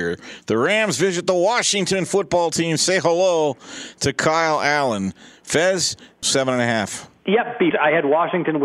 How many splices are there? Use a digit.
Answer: 2